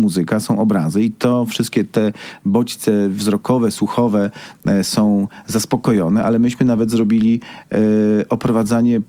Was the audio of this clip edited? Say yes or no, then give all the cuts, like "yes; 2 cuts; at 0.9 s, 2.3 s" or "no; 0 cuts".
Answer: no; 0 cuts